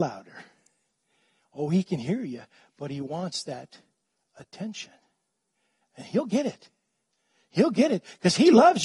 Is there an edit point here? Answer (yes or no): no